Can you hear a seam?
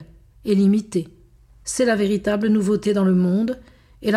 yes; 1 cut; at 1.6 s

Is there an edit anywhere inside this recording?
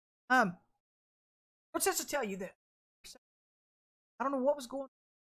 yes; 1 cut; at 3.0 s

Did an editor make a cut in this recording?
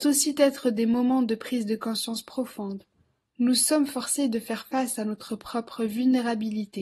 no; 0 cuts

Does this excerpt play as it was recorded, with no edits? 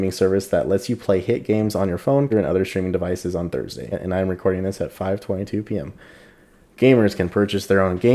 no; 2 cuts; at 2.3 s, 3.9 s

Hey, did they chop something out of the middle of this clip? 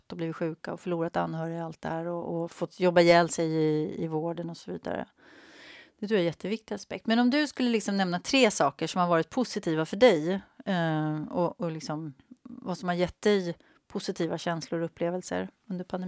no; 0 cuts

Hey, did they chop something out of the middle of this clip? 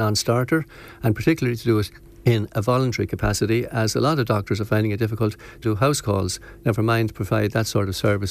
yes; 1 cut; at 5.6 s

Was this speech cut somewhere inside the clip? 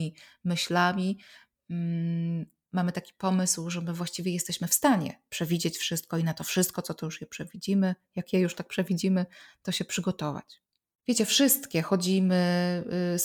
no; 0 cuts

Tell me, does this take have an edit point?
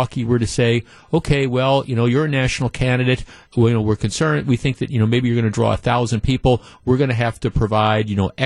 no; 0 cuts

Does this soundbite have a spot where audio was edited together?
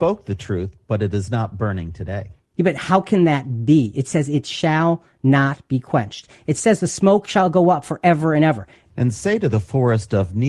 yes; 1 cut; at 8.9 s

